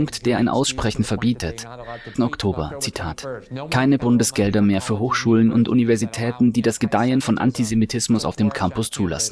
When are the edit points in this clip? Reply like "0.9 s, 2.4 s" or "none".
2.1 s